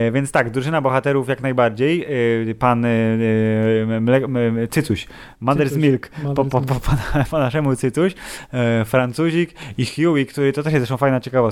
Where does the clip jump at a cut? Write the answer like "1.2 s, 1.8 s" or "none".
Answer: none